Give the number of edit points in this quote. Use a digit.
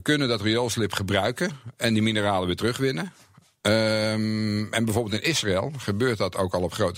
0